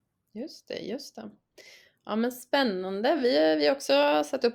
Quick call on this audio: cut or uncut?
uncut